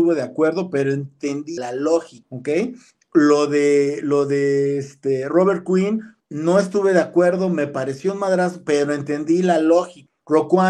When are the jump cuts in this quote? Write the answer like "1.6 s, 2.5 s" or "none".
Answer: none